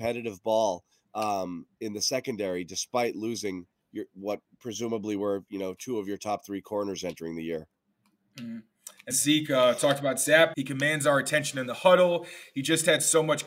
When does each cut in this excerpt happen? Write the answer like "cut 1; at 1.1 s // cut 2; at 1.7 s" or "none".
cut 1; at 9.1 s // cut 2; at 10.5 s